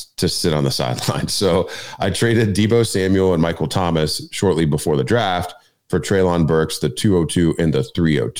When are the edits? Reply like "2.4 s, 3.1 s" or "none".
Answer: none